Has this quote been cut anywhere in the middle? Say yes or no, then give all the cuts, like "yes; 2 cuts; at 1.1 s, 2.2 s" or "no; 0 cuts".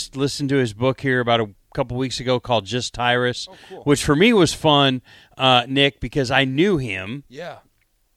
no; 0 cuts